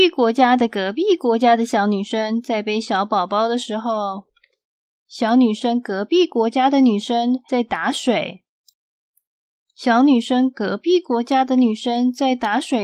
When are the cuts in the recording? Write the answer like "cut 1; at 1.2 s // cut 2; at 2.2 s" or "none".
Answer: none